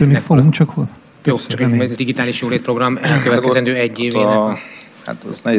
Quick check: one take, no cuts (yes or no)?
no